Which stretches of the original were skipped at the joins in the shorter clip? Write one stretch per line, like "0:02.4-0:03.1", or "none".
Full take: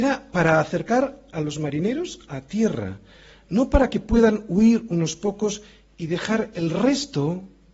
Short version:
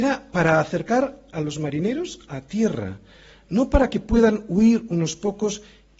none